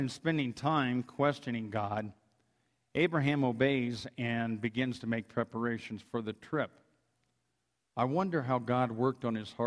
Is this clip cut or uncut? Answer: cut